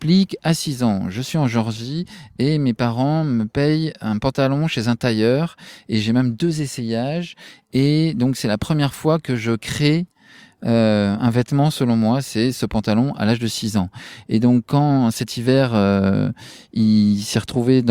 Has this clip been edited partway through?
no; 0 cuts

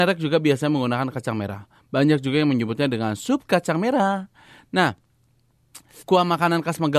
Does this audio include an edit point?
yes; 1 cut; at 6.0 s

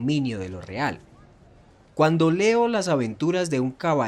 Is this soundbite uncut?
yes; 0 cuts

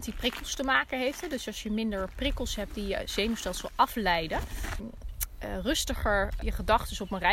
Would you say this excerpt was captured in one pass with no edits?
no; 2 cuts; at 4.8 s, 6.4 s

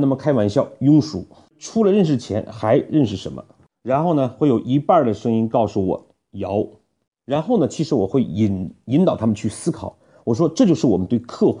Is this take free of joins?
yes; 0 cuts

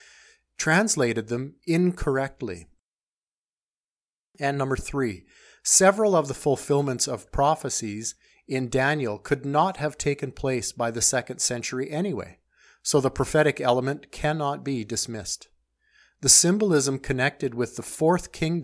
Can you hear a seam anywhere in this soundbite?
no; 0 cuts

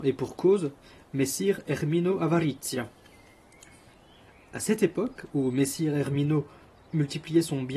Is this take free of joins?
yes; 0 cuts

